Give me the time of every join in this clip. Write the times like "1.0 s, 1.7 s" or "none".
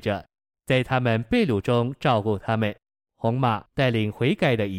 3.1 s